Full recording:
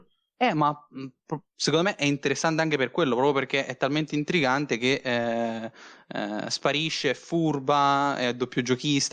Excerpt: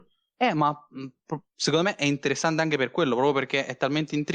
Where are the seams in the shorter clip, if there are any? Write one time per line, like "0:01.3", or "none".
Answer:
none